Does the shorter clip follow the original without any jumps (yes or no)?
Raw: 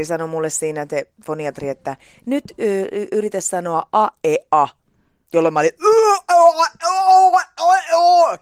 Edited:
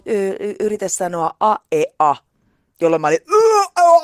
yes